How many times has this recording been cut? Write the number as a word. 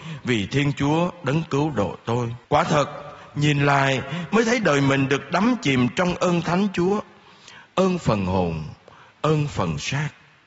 one